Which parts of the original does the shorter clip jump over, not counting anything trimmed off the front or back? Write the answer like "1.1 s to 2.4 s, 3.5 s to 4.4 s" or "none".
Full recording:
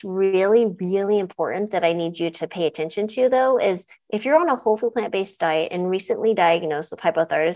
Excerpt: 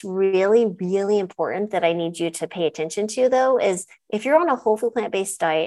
none